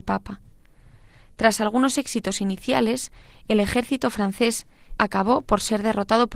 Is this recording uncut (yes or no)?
no